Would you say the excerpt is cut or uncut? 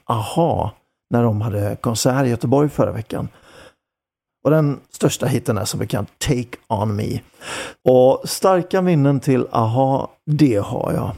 cut